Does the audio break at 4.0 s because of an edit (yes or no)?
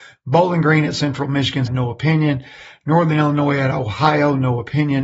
no